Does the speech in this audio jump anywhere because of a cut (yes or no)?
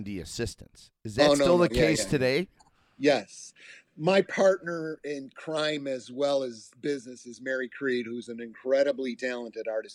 no